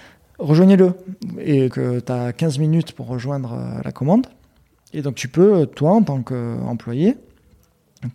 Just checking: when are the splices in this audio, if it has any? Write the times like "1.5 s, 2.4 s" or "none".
1.7 s